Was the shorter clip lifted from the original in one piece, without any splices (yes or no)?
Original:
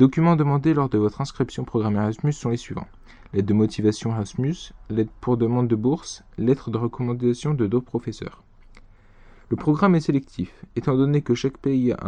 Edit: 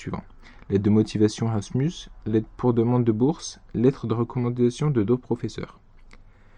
yes